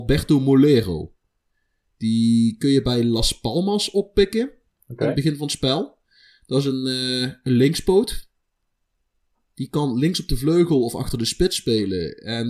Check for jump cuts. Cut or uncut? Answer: uncut